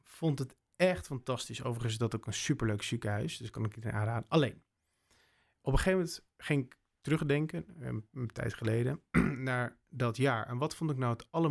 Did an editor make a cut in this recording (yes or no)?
no